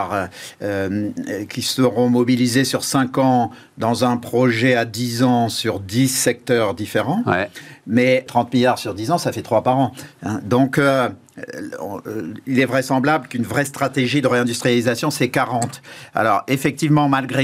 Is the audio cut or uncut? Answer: cut